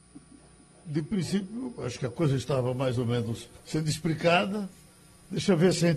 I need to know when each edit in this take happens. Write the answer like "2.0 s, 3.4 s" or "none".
3.6 s